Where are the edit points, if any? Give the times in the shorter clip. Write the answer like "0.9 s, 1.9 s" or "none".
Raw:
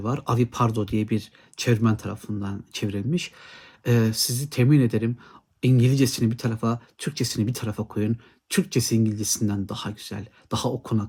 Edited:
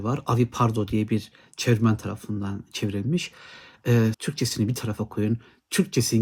4.1 s

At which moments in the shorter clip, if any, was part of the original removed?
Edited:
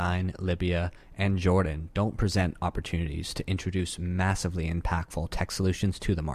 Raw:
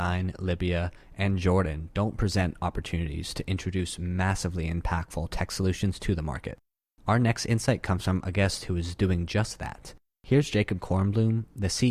none

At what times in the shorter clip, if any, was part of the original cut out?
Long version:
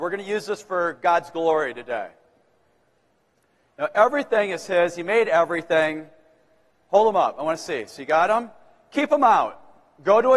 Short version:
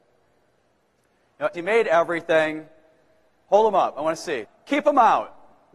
1.5 s, 4.4 s

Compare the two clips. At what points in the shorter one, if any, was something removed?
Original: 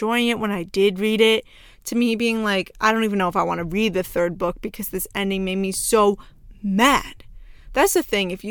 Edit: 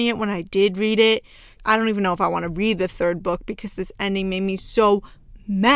1.6 s

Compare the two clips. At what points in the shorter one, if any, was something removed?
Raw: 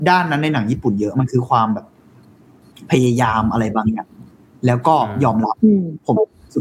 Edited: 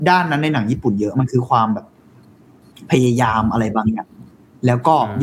none

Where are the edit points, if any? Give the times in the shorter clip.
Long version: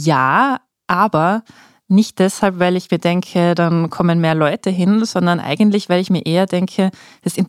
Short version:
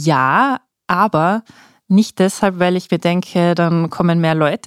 none

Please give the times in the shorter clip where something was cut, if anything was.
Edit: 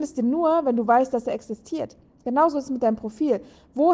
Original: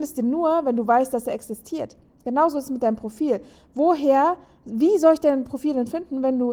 none

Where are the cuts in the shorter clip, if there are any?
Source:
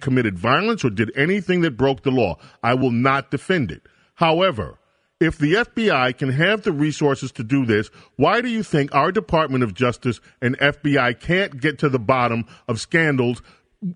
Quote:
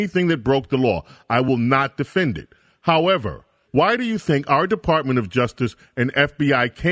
3.6 s

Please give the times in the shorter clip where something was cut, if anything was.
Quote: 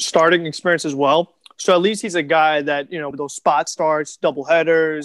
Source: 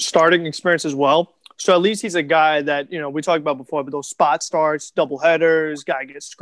3.1 s

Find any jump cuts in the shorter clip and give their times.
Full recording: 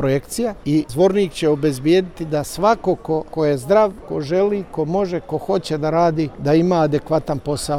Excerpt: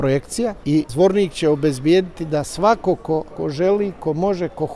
3.3 s

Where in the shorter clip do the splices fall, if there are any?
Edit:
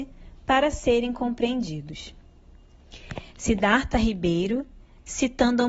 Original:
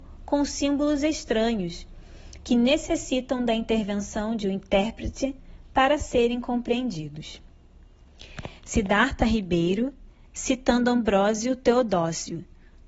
none

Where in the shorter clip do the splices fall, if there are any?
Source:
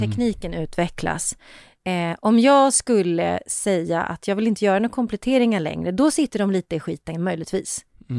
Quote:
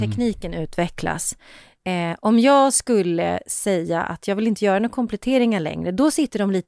none

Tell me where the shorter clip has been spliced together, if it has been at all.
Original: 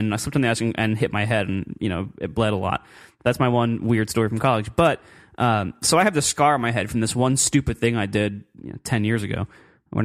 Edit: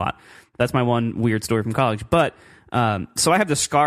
none

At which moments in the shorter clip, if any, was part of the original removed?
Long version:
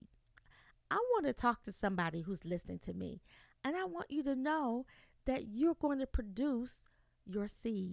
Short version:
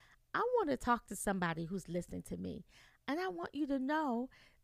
none

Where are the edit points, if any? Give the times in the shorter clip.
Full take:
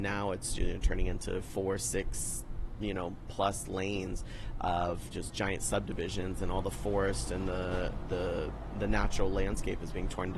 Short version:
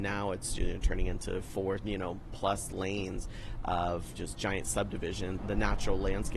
1.8 s, 5.4 s

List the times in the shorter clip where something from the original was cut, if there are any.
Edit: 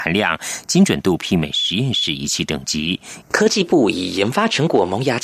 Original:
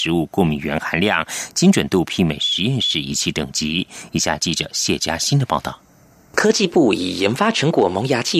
3.2 s

